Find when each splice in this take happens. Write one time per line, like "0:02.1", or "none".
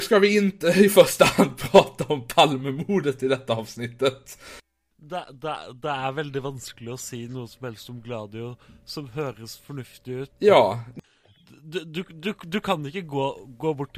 0:04.9
0:10.3